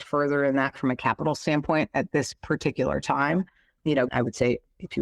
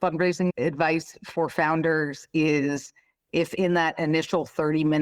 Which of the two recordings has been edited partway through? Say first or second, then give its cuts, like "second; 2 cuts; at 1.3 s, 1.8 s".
first; 1 cut; at 4.1 s